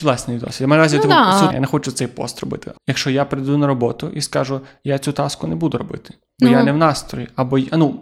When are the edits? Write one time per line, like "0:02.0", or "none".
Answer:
0:01.5
0:02.7